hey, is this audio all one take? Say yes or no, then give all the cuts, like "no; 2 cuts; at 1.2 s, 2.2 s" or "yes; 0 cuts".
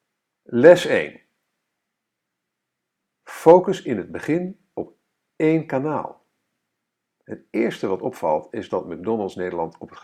yes; 0 cuts